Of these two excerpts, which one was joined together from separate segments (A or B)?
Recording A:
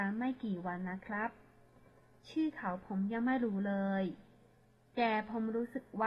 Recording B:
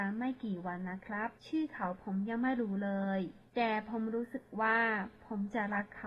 B